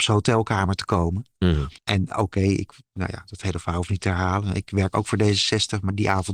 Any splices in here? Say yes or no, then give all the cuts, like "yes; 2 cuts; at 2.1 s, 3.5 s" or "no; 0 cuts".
yes; 1 cut; at 1.8 s